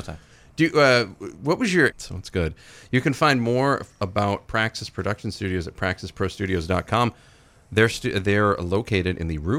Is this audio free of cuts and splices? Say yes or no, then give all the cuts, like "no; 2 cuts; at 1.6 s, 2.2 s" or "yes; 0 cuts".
no; 1 cut; at 1.9 s